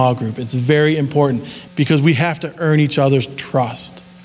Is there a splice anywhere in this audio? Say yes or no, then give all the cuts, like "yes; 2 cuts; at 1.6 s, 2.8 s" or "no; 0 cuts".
yes; 1 cut; at 1.7 s